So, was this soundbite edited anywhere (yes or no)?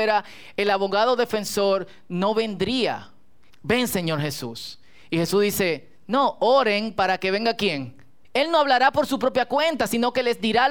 yes